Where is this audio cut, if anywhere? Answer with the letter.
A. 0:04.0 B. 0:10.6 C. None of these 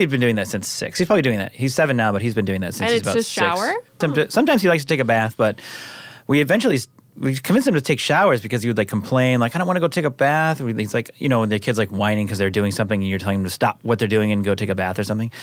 A